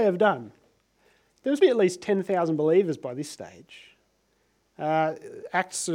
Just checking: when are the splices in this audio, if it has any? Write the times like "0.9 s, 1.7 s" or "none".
1.6 s